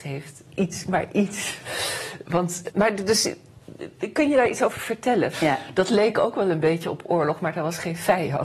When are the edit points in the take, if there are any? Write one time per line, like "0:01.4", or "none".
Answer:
0:02.7
0:05.3